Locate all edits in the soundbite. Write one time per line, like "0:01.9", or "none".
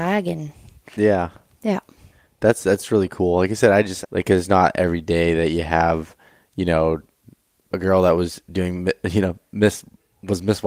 0:04.0
0:07.7